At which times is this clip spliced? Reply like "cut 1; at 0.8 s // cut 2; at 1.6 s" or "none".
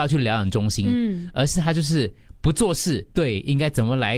cut 1; at 3.1 s